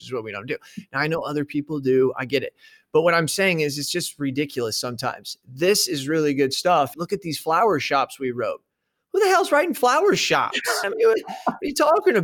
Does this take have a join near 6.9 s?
yes; 2 cuts; at 6.9 s, 10.8 s

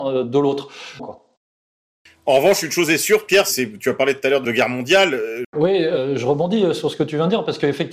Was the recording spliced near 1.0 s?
yes; 2 cuts; at 1.0 s, 5.4 s

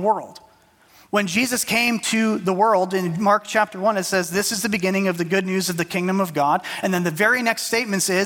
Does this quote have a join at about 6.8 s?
no; 0 cuts

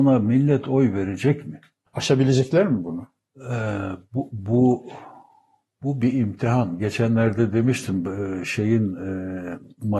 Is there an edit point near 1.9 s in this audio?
yes; 1 cut; at 1.9 s

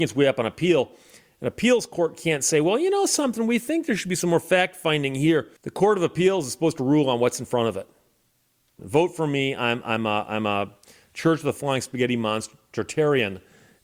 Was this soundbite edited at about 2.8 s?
no; 2 cuts; at 5.6 s, 8.8 s

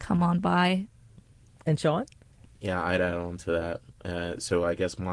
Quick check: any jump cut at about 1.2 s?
no; 0 cuts

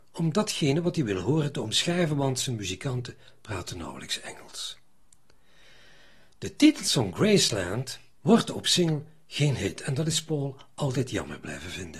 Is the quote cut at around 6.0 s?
no; 1 cut; at 8.2 s

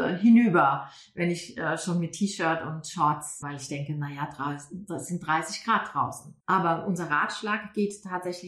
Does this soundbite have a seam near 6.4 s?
yes; 2 cuts; at 3.4 s, 6.4 s

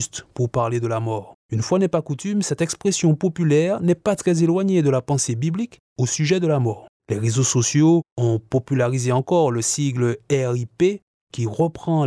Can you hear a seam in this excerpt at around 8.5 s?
no; 2 cuts; at 1.4 s, 7.0 s

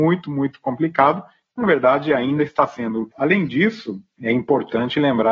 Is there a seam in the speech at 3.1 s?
yes; 1 cut; at 3.1 s

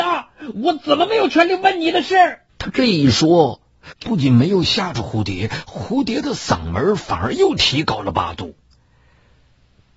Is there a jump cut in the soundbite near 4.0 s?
no; 1 cut; at 2.5 s

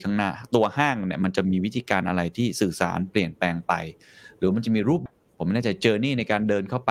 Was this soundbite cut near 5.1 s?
yes; 1 cut; at 5.1 s

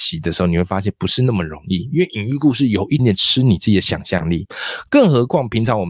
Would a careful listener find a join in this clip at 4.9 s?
no; 1 cut; at 3.0 s

